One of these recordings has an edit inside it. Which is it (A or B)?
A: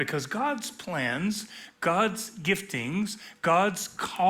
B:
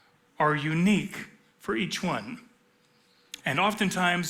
B